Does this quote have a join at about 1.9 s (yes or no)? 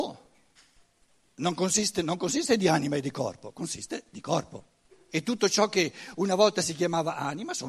no